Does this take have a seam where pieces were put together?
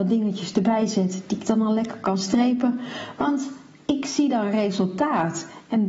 no; 0 cuts

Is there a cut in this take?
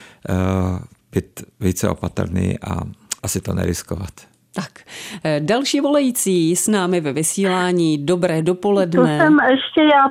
yes; 1 cut; at 3.2 s

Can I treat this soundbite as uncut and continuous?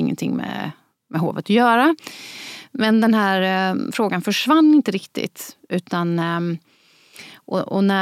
yes; 0 cuts

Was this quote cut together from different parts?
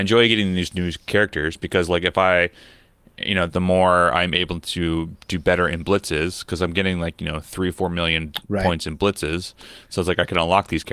yes; 1 cut; at 3.5 s

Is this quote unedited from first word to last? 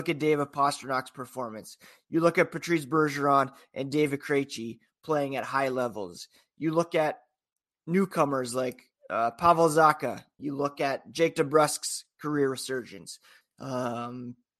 no; 2 cuts; at 10.4 s, 13.4 s

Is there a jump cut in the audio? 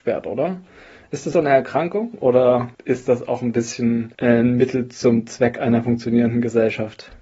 yes; 1 cut; at 1.3 s

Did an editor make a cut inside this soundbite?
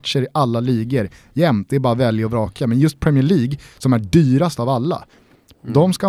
no; 0 cuts

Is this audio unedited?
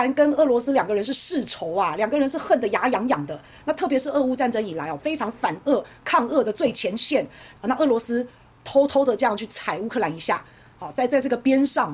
no; 2 cuts; at 5.0 s, 7.5 s

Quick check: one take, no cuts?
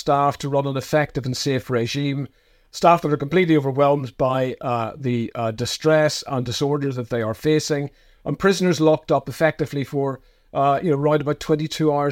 yes; 0 cuts

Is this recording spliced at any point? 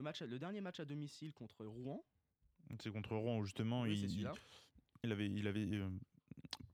yes; 1 cut; at 5.0 s

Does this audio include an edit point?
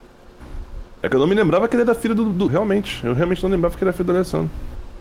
yes; 1 cut; at 2.5 s

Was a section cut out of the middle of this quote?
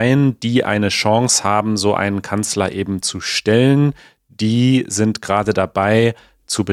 no; 0 cuts

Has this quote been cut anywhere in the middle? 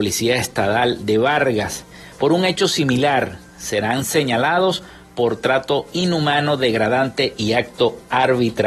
no; 0 cuts

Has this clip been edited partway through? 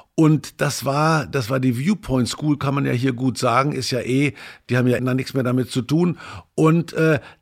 yes; 1 cut; at 5.0 s

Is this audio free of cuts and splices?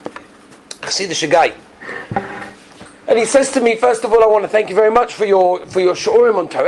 yes; 0 cuts

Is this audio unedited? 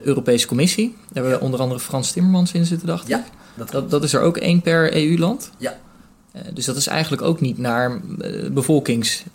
yes; 0 cuts

